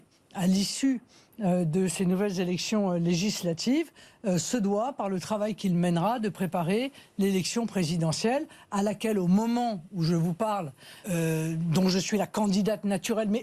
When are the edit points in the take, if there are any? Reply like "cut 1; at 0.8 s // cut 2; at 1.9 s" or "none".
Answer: cut 1; at 11.0 s